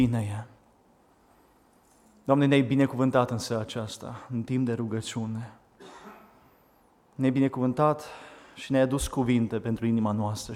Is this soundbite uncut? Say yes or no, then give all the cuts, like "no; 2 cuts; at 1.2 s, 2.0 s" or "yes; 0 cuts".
yes; 0 cuts